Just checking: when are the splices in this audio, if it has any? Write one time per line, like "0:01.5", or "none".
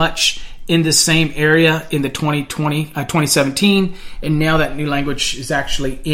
none